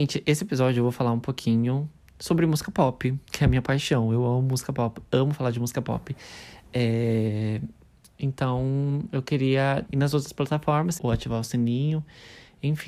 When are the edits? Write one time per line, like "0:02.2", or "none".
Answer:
0:09.9
0:11.0